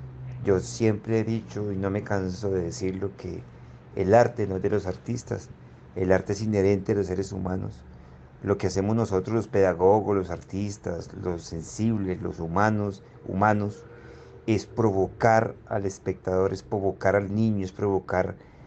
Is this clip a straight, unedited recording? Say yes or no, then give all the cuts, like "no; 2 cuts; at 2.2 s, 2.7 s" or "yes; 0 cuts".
yes; 0 cuts